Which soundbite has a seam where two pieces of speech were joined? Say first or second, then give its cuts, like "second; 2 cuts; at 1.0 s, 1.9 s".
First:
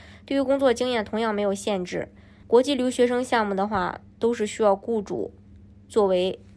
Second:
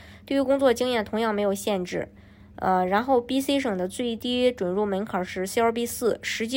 first; 1 cut; at 2.4 s